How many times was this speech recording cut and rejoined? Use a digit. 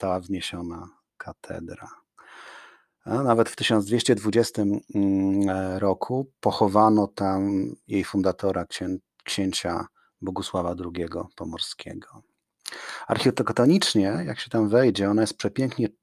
0